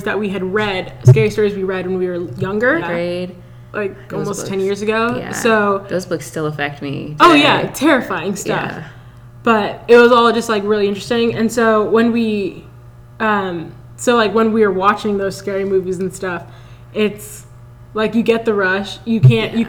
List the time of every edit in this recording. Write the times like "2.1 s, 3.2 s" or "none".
2.8 s